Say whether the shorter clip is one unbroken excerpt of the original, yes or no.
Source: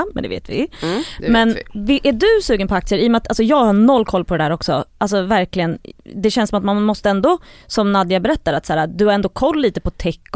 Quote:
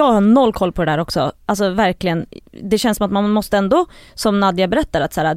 yes